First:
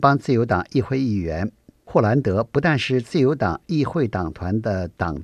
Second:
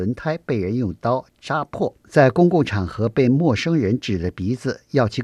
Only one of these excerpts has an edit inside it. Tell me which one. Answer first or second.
second